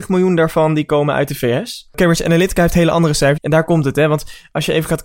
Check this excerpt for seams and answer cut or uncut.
cut